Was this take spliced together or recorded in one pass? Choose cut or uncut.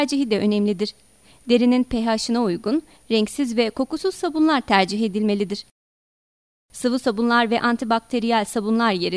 uncut